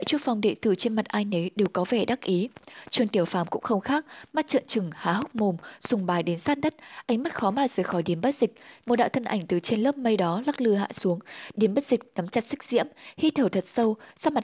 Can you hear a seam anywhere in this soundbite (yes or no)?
yes